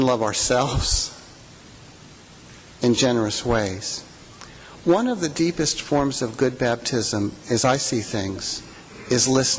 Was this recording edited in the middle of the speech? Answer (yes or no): no